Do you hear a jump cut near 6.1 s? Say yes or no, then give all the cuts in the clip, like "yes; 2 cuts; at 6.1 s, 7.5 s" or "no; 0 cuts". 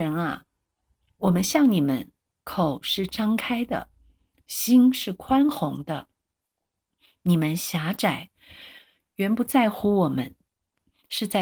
no; 0 cuts